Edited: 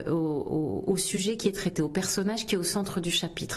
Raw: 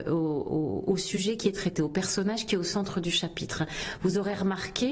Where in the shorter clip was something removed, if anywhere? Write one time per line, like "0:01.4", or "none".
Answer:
none

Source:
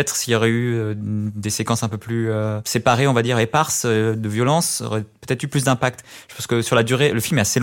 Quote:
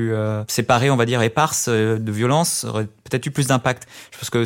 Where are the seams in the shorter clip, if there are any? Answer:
none

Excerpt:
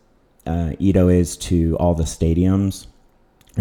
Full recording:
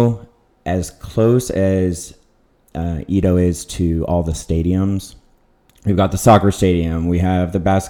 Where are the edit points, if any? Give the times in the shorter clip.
none

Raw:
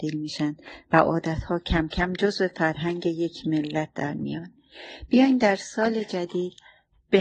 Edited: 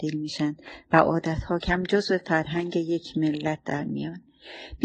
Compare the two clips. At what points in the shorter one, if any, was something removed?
0:01.6

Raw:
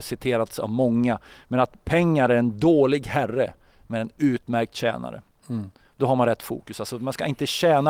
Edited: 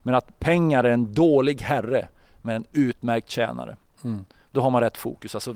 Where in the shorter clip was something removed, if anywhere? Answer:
none

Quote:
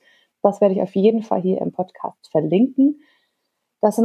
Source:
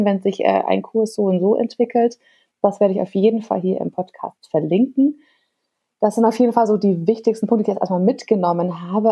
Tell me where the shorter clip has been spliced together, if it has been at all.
none

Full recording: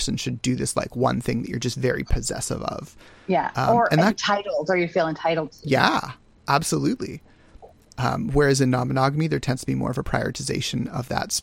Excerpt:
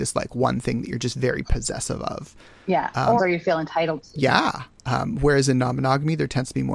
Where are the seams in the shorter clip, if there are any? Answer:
0:03.2
0:04.8

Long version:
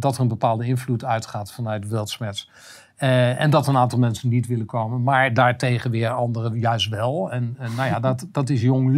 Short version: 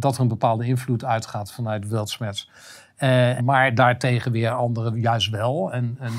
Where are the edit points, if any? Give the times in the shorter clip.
0:03.4

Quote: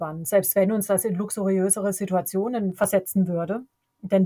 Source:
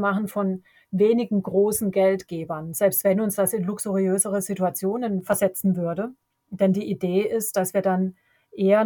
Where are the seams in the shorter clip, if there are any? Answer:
none

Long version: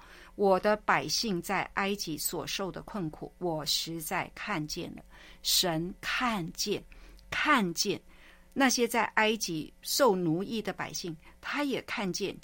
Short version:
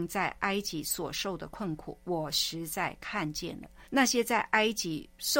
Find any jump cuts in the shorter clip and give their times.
0:03.8

